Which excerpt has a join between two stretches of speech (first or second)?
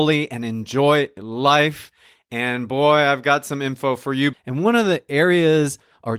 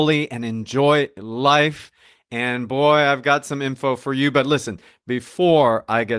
first